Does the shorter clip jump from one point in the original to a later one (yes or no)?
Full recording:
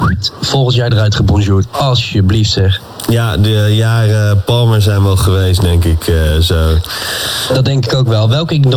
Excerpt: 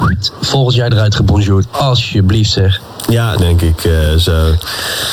yes